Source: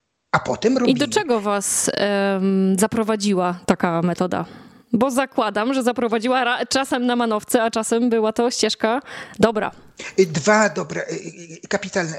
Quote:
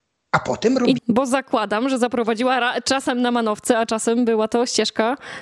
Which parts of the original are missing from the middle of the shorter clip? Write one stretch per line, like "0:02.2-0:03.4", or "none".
0:01.0-0:04.8